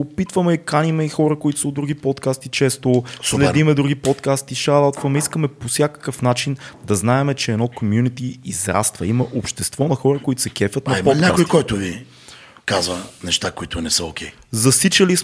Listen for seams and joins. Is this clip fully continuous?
yes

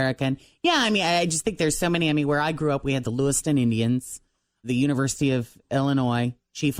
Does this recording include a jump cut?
yes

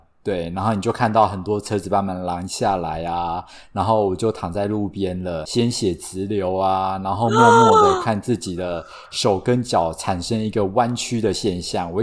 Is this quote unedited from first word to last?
yes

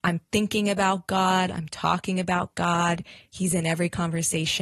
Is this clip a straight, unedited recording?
yes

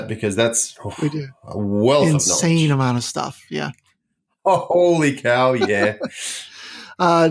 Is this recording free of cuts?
yes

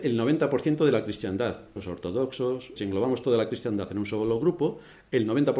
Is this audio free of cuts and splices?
no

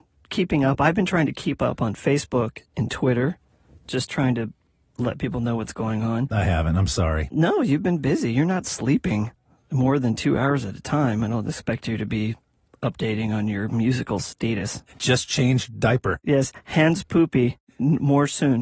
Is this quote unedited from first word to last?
yes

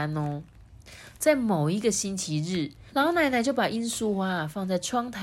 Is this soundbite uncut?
no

